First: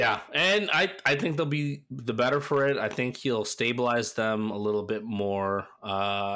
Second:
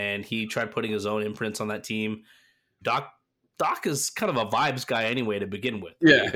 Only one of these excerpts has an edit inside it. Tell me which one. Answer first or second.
second